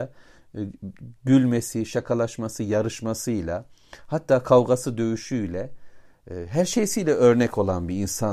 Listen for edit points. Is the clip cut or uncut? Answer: uncut